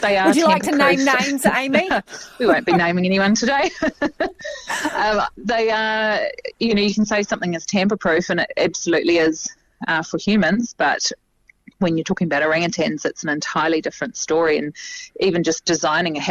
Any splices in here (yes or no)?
no